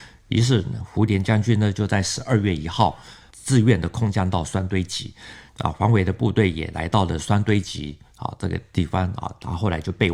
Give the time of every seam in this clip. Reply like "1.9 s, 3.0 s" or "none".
5.5 s